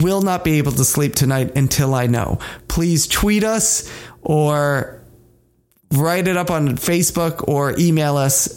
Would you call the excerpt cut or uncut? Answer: uncut